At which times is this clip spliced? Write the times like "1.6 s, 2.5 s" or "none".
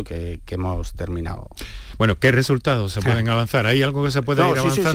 none